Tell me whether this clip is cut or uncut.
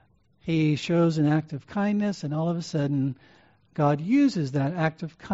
uncut